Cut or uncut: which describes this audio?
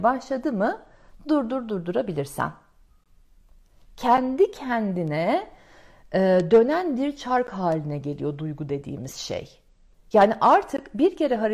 uncut